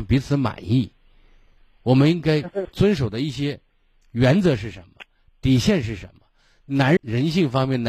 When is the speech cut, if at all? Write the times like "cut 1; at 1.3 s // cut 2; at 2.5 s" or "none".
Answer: cut 1; at 7.0 s